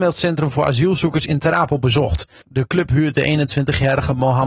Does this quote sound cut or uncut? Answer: cut